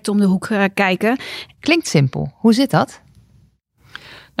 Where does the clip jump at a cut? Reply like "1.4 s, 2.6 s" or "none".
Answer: 1.6 s